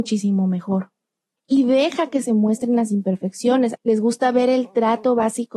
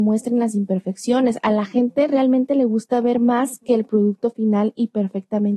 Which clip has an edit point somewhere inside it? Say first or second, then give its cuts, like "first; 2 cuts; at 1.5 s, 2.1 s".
first; 1 cut; at 3.8 s